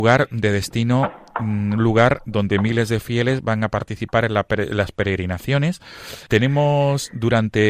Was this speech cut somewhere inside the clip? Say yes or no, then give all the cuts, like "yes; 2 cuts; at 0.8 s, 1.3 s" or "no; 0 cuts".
yes; 1 cut; at 6.3 s